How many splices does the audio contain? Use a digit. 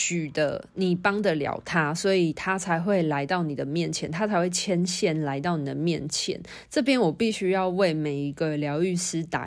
0